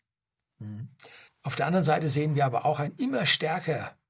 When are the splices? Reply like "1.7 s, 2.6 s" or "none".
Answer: 1.3 s

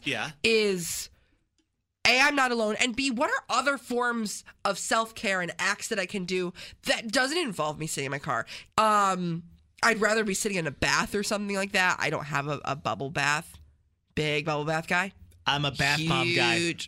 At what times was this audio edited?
8.7 s

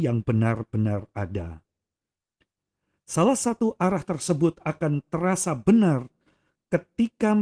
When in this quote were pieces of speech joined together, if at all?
none

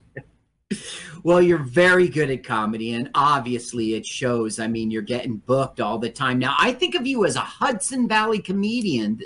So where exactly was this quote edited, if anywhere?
none

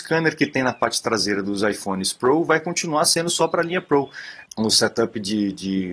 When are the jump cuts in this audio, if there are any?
4.5 s

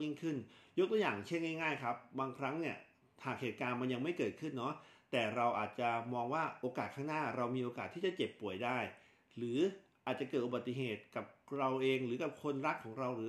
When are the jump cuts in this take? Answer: none

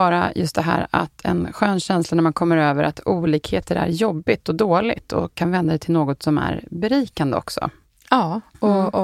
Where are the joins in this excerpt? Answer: none

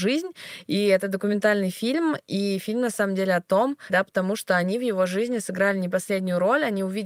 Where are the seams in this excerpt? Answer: 3.9 s

